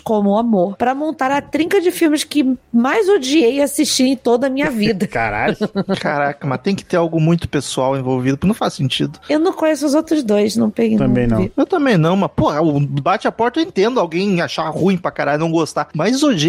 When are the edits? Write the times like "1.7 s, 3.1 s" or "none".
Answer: none